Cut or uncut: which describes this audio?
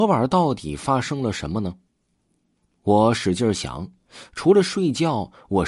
uncut